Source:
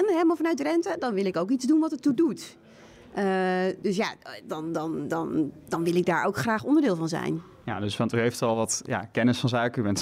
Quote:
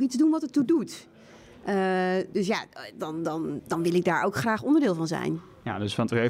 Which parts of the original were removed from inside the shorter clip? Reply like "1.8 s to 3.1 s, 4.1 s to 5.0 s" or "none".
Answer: 5.1 s to 5.6 s

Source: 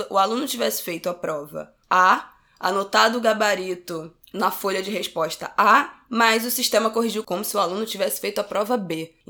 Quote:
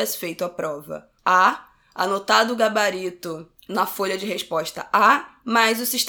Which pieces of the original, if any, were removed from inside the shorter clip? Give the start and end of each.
none

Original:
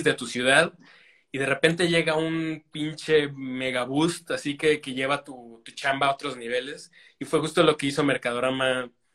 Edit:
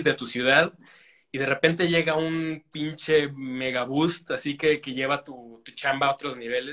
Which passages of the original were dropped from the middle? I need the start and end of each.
none

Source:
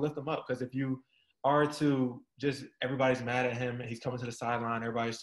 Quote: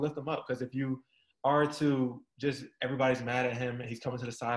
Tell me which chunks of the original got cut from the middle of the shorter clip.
none

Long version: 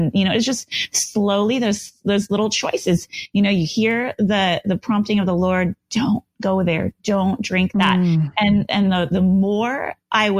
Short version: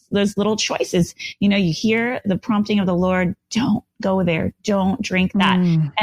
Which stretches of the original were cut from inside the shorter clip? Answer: 4.1 s to 4.6 s

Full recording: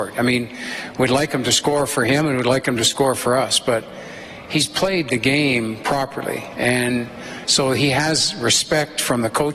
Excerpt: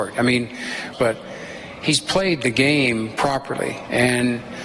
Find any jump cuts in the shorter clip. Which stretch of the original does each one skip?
0.9 s to 3.6 s

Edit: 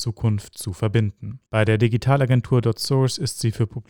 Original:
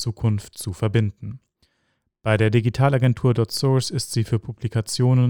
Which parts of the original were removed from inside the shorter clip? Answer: 1.5 s to 2.2 s

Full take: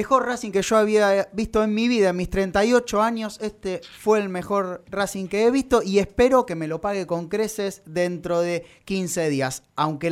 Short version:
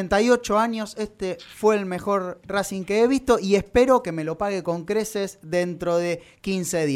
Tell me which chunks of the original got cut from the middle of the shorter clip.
none

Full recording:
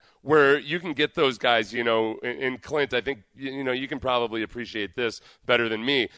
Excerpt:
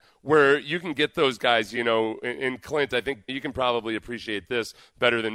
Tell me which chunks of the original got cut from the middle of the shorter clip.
3.3 s to 3.8 s

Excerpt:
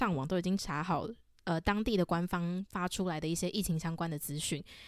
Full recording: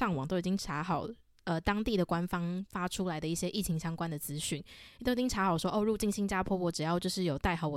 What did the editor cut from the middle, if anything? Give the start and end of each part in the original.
none

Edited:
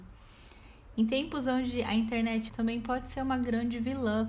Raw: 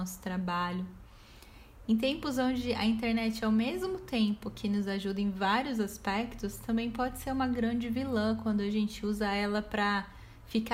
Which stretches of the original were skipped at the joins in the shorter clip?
3.4 s to 6.6 s

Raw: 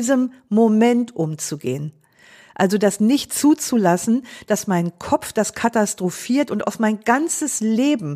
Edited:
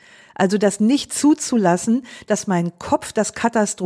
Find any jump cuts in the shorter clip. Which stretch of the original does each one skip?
none

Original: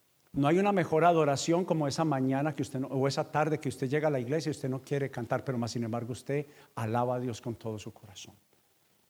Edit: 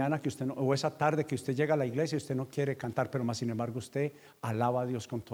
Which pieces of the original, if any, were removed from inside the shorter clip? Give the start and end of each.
none

